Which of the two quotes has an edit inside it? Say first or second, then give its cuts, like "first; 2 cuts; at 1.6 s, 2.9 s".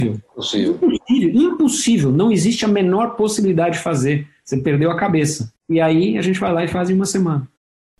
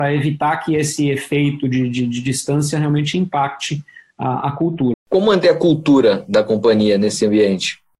second; 1 cut; at 4.9 s